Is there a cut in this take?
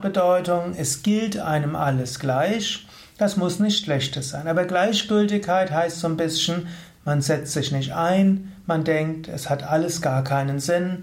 no; 0 cuts

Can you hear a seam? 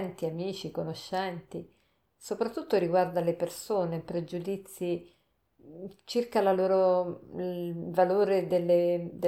no; 0 cuts

